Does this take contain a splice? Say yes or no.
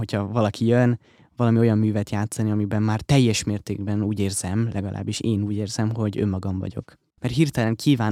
yes